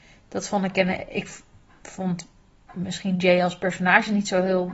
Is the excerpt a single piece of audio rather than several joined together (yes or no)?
yes